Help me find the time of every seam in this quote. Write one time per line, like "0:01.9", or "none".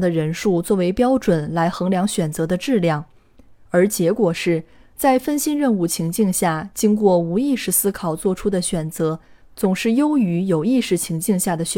none

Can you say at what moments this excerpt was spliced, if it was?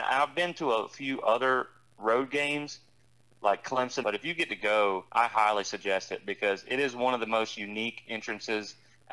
0:04.0
0:05.1

